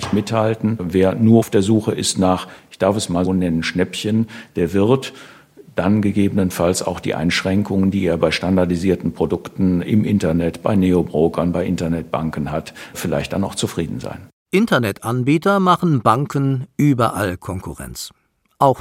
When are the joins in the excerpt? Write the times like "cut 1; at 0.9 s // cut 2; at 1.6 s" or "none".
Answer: cut 1; at 3.3 s